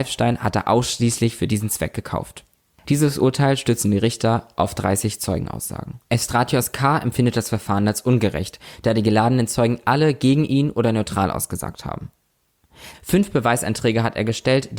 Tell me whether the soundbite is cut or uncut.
cut